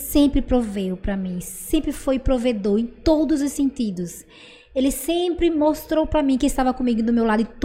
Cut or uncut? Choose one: uncut